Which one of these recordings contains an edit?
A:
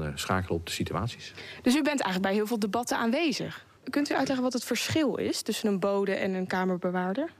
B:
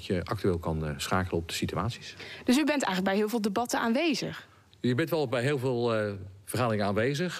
A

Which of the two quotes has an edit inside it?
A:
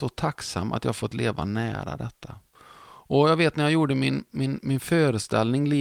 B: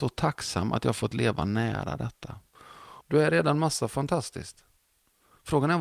B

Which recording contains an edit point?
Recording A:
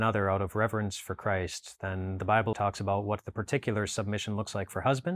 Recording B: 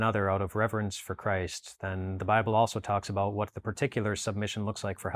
A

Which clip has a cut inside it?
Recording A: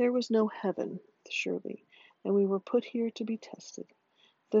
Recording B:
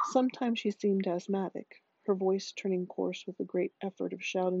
A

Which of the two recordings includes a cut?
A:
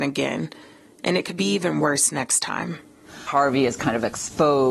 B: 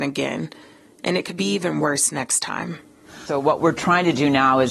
A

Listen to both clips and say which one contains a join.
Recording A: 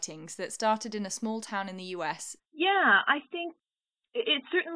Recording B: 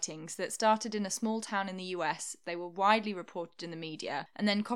A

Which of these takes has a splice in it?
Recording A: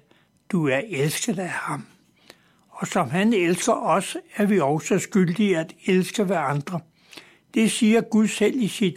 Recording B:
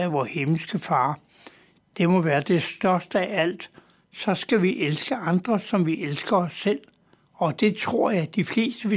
B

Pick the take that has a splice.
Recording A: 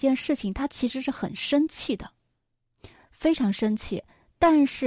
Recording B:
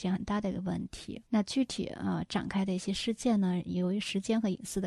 B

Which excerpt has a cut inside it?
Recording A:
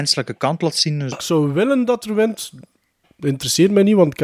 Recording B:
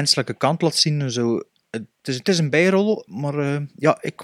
A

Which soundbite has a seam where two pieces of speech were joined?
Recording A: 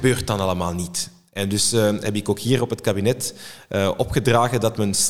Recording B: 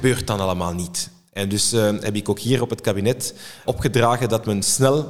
B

